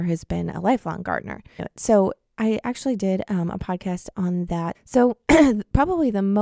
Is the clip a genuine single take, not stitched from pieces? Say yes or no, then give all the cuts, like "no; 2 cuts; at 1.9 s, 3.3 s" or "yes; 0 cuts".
no; 2 cuts; at 1.6 s, 4.7 s